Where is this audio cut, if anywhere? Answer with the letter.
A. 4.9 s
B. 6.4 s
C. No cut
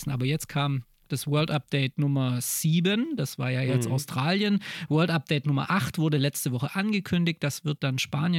C